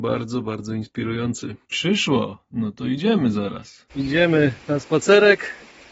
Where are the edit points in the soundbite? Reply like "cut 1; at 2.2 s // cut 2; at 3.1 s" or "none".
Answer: cut 1; at 1.6 s // cut 2; at 3.9 s